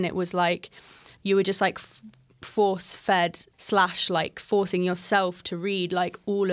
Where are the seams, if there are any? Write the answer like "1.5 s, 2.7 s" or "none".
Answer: 3.5 s

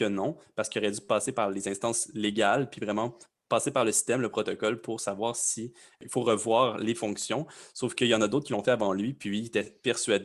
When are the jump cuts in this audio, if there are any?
none

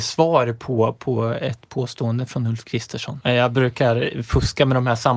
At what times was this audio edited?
3.2 s

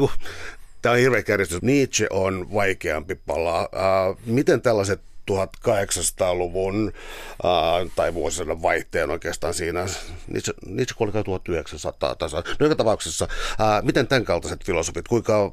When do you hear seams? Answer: 1.6 s

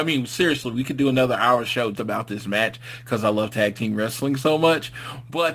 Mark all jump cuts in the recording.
1.9 s

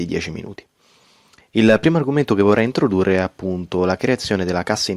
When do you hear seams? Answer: none

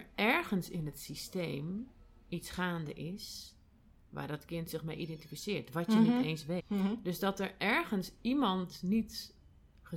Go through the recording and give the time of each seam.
6.6 s

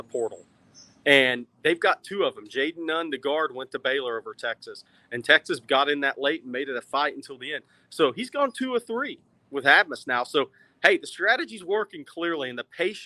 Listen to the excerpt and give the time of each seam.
none

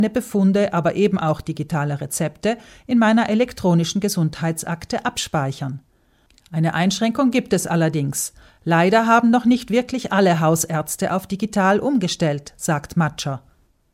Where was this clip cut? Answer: none

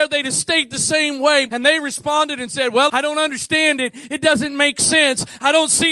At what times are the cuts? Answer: 1.5 s, 2.9 s

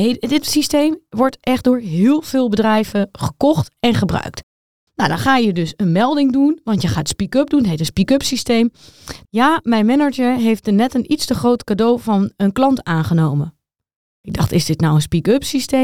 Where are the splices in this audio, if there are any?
9.2 s

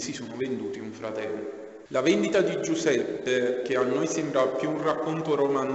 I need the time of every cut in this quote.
1.9 s, 3.6 s

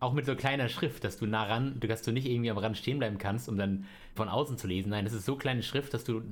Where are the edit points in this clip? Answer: 4.2 s

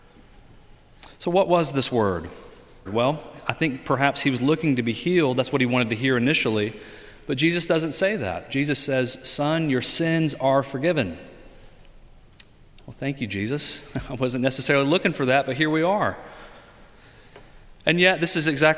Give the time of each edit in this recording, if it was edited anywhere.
2.9 s

